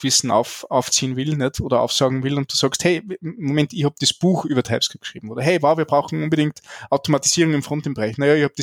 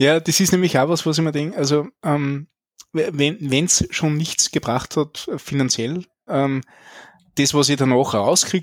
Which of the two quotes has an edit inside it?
second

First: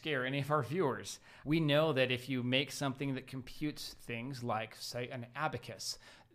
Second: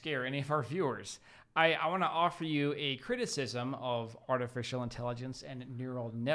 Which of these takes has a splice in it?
first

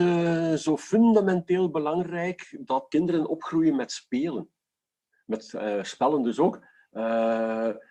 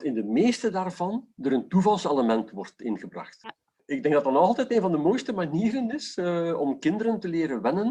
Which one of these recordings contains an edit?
second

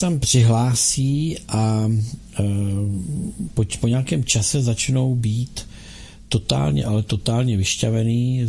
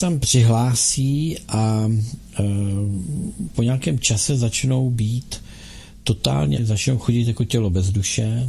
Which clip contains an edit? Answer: second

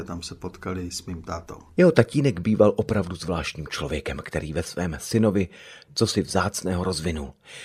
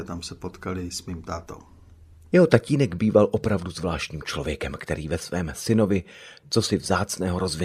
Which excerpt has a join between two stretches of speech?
first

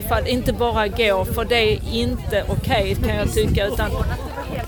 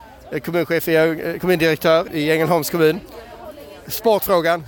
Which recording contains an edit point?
second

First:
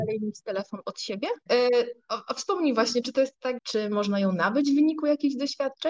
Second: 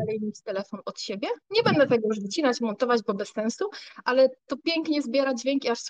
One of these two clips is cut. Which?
first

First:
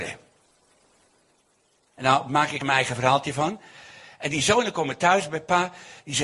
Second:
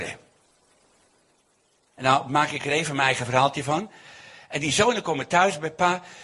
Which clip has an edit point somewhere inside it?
first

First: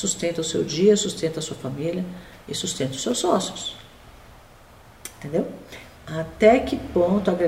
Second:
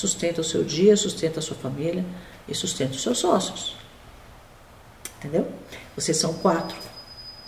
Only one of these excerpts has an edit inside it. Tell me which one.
first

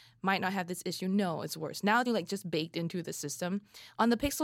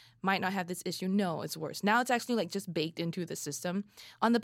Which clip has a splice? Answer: first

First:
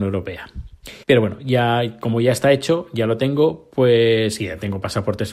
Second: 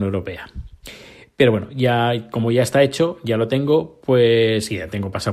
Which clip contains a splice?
first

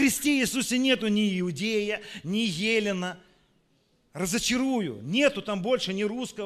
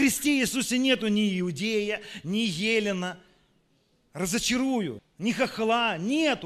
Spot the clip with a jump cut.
second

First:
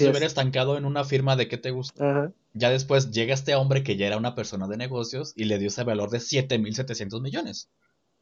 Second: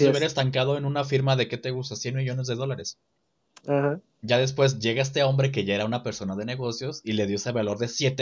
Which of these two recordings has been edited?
first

